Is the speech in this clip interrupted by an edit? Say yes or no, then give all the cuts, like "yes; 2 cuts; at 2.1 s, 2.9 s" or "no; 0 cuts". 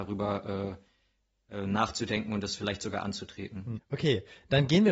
yes; 1 cut; at 3.8 s